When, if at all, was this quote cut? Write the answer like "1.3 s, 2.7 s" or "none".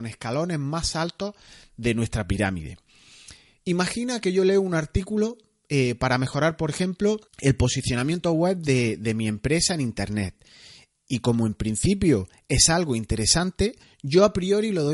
7.3 s